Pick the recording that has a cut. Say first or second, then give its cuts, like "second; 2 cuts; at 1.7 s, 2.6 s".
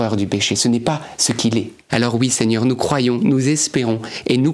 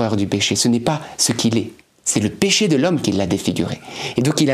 first; 2 cuts; at 1.9 s, 3.2 s